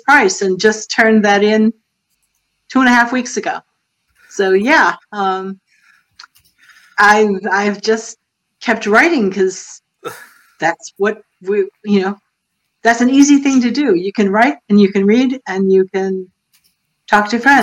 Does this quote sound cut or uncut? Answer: cut